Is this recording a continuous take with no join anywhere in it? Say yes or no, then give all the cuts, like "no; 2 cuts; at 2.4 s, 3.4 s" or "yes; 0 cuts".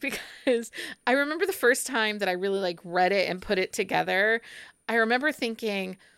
yes; 0 cuts